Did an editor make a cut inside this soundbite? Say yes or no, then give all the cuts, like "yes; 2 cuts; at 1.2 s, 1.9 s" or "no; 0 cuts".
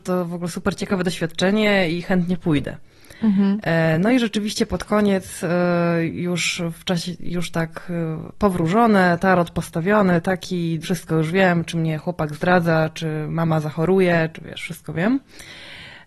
yes; 2 cuts; at 10.8 s, 14.3 s